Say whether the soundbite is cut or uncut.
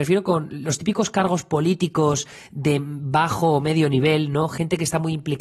uncut